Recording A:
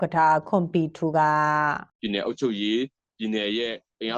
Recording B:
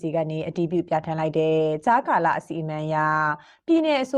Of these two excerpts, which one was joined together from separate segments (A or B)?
A